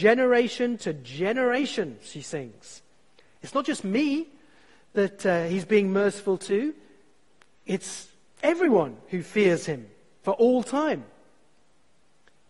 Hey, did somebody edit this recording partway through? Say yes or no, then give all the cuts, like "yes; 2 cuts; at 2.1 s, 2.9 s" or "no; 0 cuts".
no; 0 cuts